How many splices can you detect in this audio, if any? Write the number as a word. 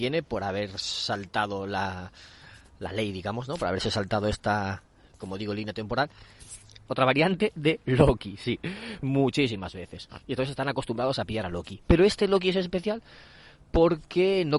two